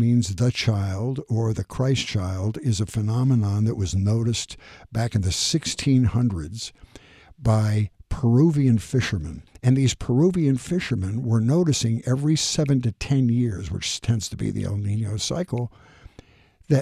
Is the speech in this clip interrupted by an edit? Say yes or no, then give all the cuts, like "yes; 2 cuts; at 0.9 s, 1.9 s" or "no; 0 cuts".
no; 0 cuts